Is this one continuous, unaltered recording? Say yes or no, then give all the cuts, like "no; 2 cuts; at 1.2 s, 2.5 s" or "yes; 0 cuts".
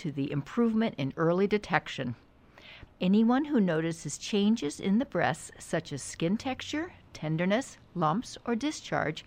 no; 1 cut; at 2.9 s